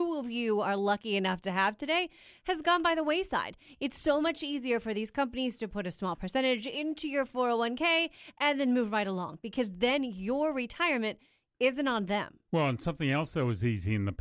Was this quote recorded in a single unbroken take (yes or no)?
yes